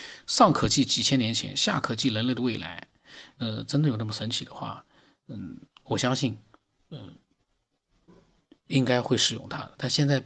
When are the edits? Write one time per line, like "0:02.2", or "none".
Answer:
0:03.3